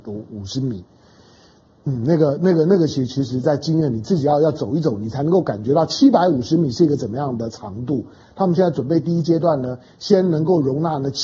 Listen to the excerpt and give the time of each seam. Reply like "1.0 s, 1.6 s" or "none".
8.2 s